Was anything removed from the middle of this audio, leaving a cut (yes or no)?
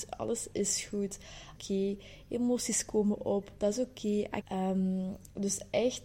yes